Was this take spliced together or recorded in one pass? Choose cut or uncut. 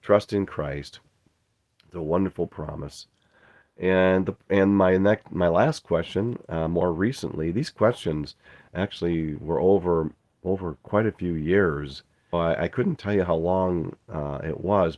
cut